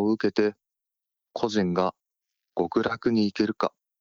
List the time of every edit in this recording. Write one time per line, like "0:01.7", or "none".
0:01.3